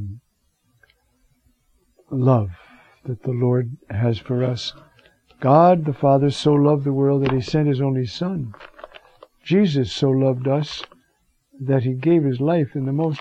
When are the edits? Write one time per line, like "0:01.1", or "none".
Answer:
none